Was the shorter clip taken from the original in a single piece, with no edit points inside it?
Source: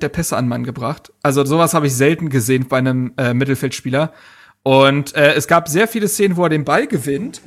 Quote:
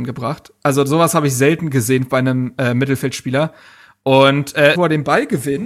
no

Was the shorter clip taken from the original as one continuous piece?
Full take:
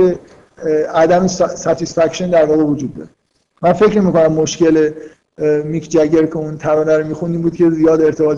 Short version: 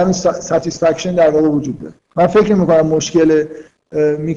no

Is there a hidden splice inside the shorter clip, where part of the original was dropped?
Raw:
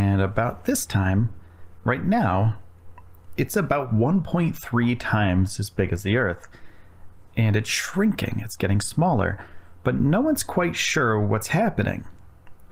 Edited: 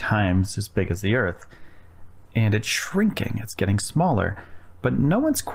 no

